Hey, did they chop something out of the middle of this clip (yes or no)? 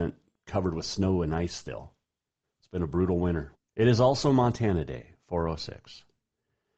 yes